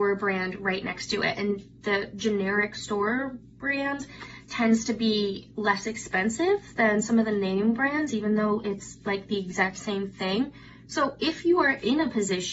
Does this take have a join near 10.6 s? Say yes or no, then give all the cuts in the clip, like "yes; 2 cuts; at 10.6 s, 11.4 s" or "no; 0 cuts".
no; 0 cuts